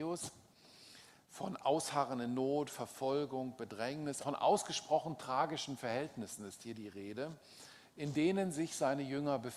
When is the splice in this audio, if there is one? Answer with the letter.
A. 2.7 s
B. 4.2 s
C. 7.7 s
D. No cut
B